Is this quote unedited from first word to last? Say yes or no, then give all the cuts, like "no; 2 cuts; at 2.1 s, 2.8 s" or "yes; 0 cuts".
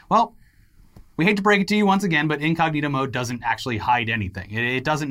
yes; 0 cuts